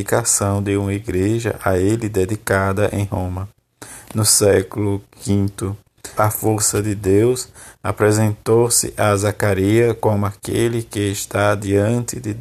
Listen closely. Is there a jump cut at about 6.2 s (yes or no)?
yes